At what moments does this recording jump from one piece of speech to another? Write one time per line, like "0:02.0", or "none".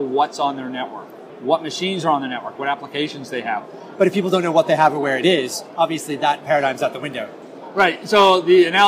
0:02.6
0:04.0